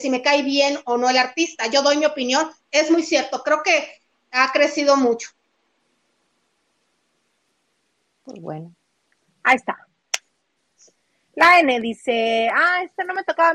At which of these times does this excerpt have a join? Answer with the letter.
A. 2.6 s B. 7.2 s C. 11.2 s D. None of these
A